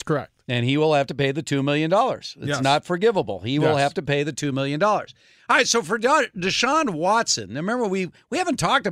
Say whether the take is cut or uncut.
uncut